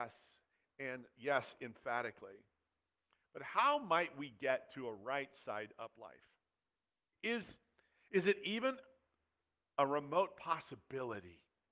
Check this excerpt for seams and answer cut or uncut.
cut